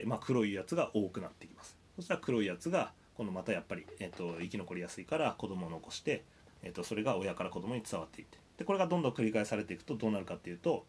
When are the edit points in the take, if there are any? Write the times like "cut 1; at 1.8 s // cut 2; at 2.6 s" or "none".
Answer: cut 1; at 6.5 s